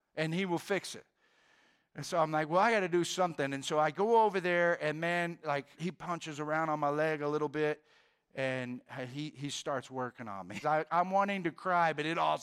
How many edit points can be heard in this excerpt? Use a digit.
2